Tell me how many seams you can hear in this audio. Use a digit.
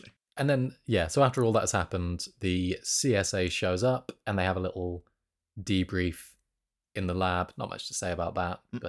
0